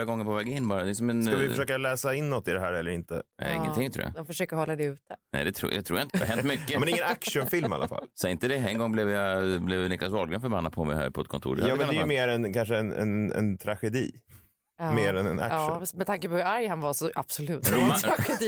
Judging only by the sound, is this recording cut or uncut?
cut